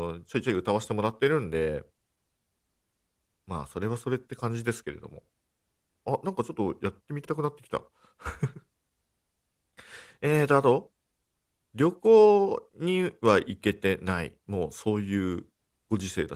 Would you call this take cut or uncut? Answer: cut